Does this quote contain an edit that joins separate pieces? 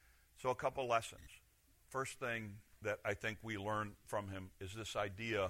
no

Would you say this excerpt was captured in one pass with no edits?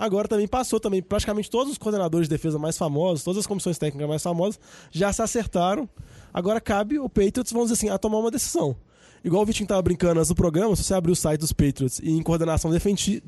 yes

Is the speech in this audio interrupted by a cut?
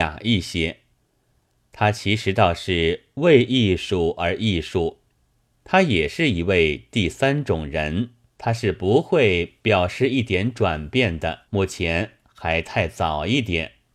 yes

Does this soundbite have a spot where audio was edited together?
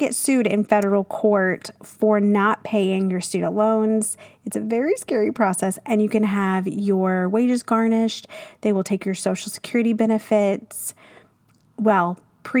no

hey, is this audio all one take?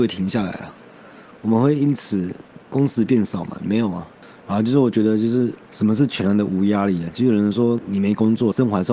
yes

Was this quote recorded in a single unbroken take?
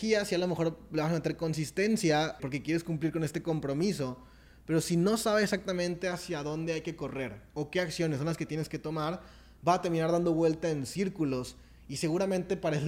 no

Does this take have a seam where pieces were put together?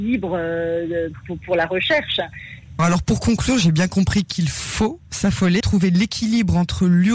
yes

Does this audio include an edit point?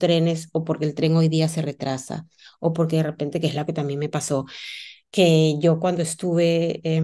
no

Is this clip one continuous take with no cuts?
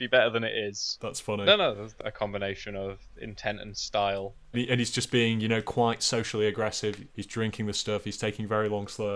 no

